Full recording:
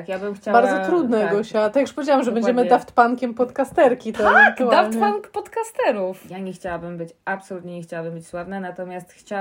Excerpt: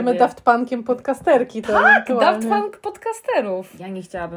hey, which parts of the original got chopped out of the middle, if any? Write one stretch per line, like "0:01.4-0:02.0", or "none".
none